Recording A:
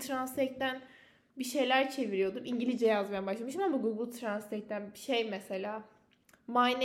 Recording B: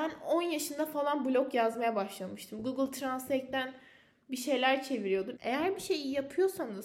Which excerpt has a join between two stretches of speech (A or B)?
B